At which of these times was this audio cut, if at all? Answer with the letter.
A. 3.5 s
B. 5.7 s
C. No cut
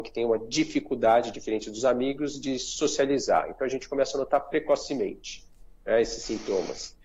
C